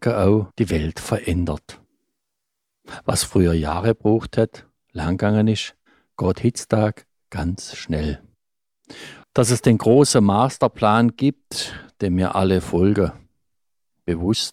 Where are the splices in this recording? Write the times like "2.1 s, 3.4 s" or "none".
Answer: 9.2 s